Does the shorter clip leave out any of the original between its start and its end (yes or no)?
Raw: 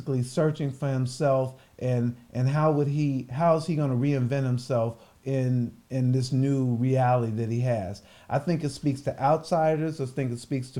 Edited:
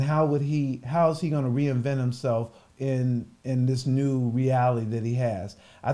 no